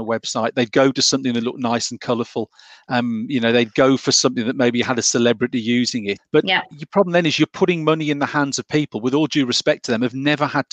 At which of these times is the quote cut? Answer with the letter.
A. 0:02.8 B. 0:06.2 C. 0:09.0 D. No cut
B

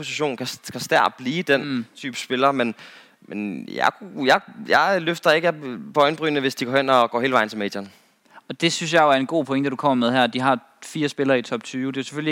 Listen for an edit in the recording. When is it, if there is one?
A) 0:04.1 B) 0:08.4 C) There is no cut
C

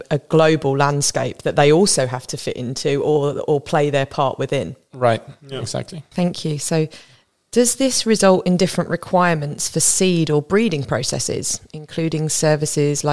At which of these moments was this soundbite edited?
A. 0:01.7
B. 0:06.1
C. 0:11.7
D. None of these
B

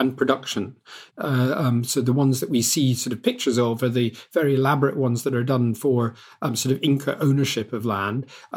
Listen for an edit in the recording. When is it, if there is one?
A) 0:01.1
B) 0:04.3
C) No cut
A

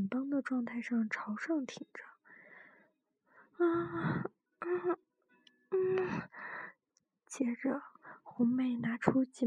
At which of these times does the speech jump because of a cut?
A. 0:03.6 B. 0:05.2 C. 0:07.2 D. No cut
D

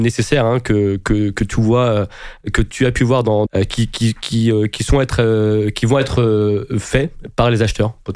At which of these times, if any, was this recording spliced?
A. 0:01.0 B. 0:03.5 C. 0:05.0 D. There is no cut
B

